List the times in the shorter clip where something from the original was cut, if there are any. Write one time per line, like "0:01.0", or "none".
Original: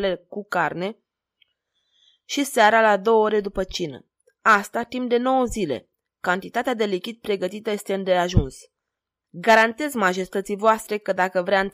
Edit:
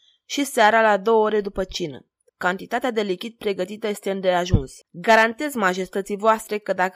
0:02.3
0:04.8